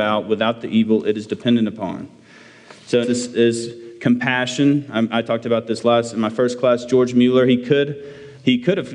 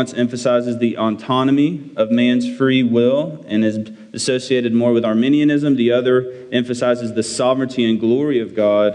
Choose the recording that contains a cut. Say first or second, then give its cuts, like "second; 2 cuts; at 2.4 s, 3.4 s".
first; 1 cut; at 3.0 s